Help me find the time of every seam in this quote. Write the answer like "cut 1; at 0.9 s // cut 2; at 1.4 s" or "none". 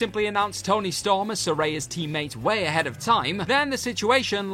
cut 1; at 3.5 s